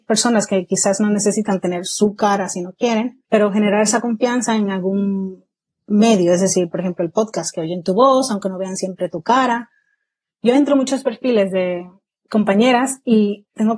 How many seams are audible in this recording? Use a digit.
1